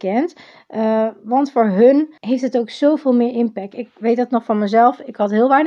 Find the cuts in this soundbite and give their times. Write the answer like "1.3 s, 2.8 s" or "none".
2.2 s, 3.7 s